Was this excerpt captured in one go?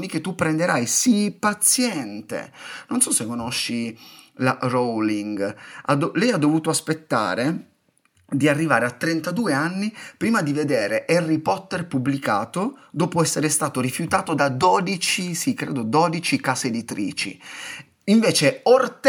yes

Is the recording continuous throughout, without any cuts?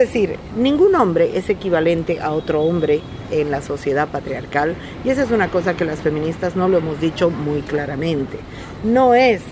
yes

